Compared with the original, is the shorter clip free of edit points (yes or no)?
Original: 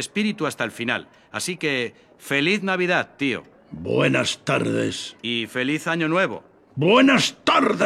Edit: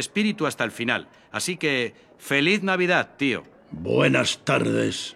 yes